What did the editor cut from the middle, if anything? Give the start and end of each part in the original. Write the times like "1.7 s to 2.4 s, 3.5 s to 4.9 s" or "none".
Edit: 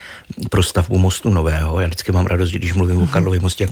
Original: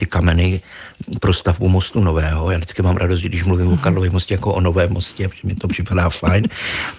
none